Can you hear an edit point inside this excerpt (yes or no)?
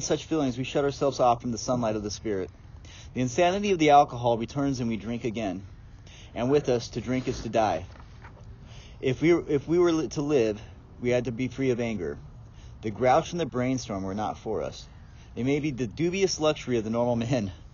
no